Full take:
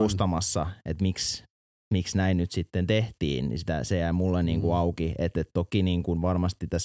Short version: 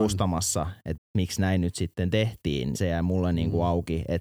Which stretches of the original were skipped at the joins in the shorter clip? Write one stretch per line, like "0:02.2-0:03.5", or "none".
0:01.0-0:01.7
0:03.5-0:03.9